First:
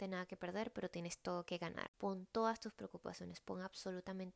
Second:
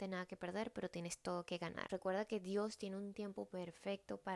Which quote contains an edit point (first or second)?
second